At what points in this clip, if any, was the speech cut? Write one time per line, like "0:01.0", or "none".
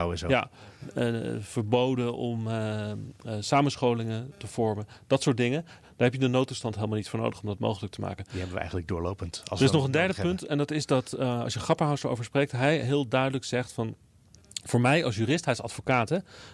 0:05.8